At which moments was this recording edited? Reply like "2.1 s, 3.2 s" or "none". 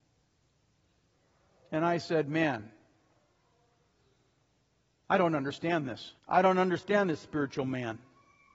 6.2 s